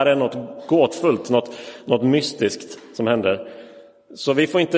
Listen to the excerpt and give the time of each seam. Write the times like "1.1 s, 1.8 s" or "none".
none